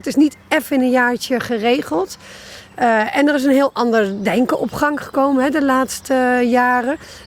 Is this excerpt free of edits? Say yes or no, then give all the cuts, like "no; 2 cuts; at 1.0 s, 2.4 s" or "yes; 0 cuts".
yes; 0 cuts